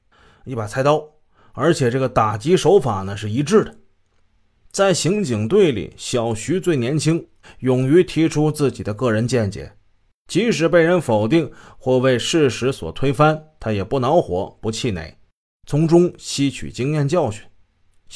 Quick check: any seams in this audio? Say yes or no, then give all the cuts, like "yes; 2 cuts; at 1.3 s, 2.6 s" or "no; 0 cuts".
yes; 1 cut; at 7.4 s